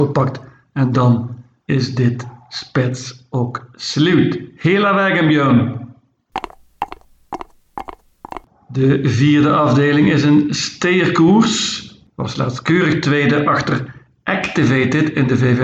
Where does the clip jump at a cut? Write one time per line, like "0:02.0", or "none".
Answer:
0:12.1